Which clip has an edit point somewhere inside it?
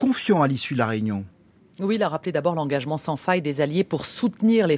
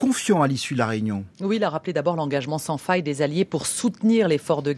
second; 1 cut; at 1.3 s

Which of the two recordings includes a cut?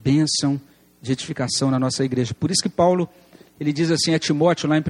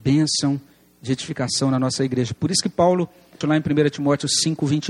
second; 1 cut; at 3.4 s

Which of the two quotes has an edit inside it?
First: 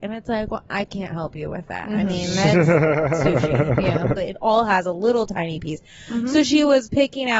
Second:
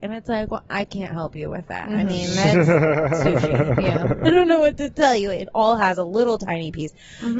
first; 1 cut; at 4.2 s

